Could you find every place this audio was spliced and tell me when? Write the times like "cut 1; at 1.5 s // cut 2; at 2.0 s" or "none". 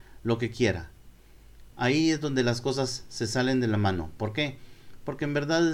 cut 1; at 1.7 s